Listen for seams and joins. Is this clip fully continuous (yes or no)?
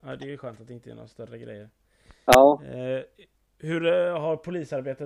yes